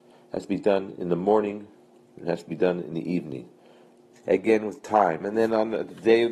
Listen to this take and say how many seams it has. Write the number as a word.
one